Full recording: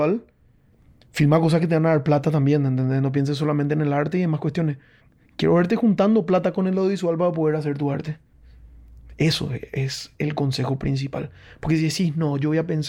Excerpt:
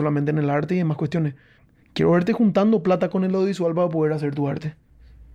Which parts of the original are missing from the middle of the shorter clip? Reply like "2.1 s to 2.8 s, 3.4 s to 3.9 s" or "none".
none